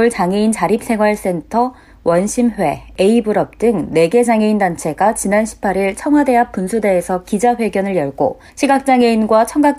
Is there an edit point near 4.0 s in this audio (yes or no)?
no